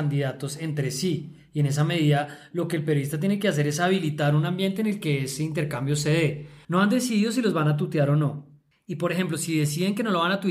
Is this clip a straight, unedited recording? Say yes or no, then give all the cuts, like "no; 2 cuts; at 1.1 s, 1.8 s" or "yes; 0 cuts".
no; 1 cut; at 6.6 s